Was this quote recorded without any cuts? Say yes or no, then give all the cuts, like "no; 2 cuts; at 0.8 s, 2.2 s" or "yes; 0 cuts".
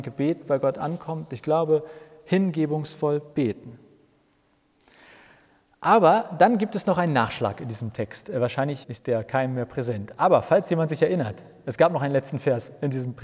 no; 1 cut; at 8.8 s